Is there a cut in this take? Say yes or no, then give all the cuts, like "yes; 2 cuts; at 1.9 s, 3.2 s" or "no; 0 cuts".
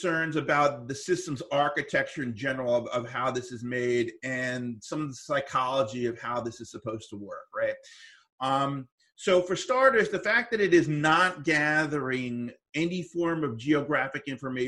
no; 0 cuts